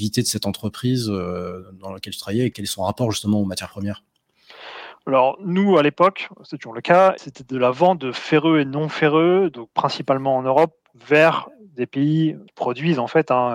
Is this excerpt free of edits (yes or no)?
yes